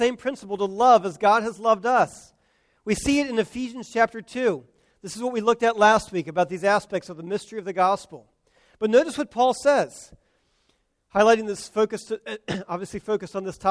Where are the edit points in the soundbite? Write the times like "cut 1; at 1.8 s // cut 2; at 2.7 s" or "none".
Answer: none